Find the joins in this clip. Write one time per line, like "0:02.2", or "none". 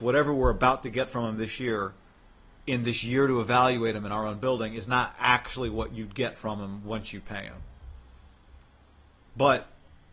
none